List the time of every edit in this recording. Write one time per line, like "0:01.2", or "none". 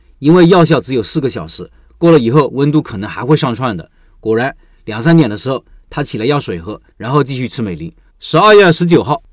0:06.9
0:08.1